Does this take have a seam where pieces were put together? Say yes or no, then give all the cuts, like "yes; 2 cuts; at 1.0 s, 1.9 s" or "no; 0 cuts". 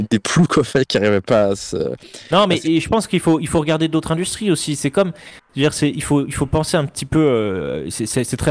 no; 0 cuts